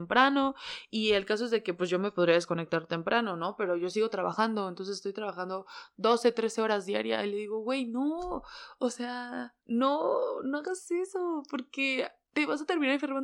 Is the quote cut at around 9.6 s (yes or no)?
yes